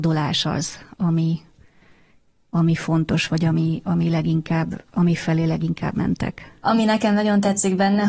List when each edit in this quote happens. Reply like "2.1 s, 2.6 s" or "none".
6.6 s